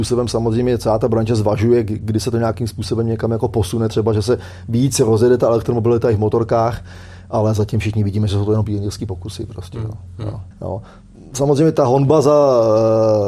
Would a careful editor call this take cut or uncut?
cut